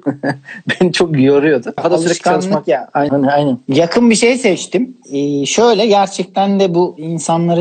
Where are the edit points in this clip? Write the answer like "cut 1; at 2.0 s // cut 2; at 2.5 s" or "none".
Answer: cut 1; at 1.8 s // cut 2; at 3.1 s